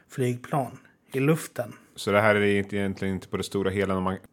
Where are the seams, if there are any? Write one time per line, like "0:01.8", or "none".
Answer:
none